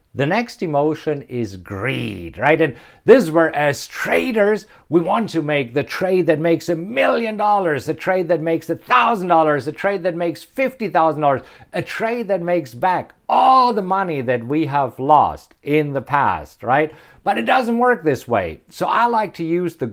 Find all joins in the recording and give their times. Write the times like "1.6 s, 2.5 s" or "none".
none